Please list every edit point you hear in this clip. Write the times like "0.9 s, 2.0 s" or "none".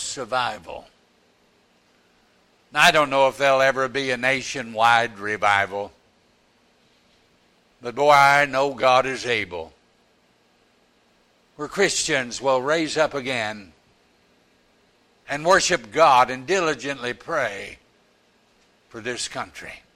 none

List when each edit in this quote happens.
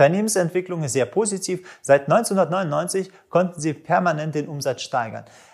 none

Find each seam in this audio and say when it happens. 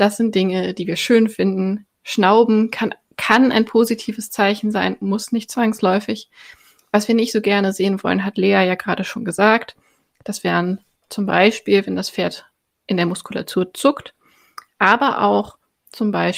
none

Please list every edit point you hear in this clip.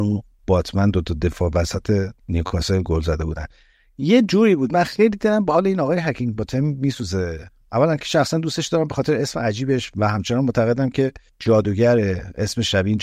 2.2 s

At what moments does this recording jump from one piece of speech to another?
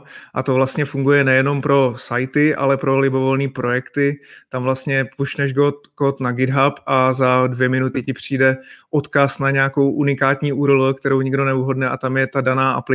none

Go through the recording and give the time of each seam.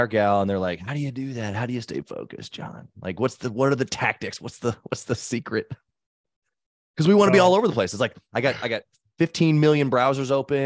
none

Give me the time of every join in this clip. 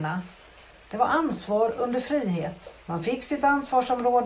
2.8 s

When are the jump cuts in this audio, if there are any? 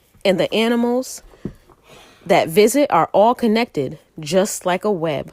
none

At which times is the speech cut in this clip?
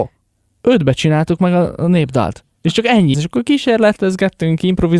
3.1 s

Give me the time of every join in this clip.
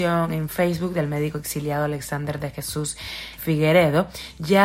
3.4 s

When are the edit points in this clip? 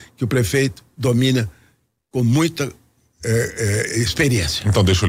none

